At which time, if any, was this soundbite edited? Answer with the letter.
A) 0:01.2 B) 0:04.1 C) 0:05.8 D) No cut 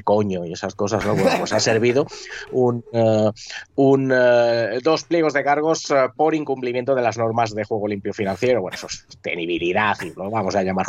D